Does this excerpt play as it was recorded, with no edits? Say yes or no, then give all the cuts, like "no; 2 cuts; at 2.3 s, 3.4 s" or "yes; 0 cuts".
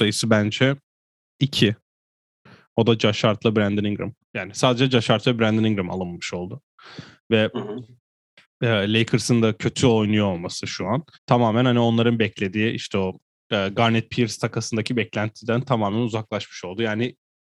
no; 2 cuts; at 4.2 s, 11.1 s